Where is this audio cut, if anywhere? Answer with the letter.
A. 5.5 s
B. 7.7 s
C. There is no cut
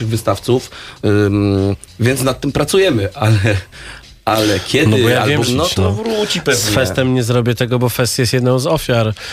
A